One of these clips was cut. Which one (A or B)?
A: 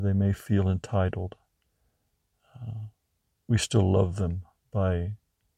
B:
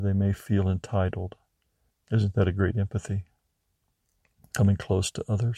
B